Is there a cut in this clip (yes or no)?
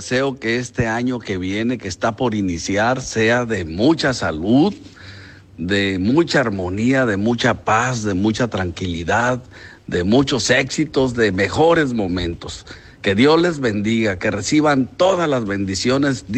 no